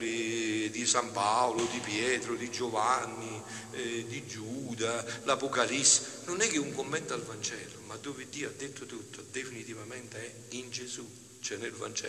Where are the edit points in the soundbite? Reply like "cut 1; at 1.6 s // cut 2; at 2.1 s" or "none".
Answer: none

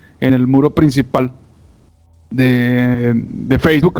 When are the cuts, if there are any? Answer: none

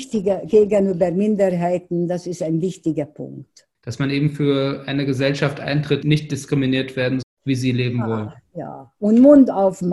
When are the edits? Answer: cut 1; at 3.7 s // cut 2; at 6.0 s // cut 3; at 7.2 s

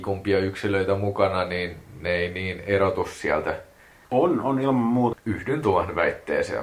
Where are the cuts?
cut 1; at 4.0 s // cut 2; at 5.1 s

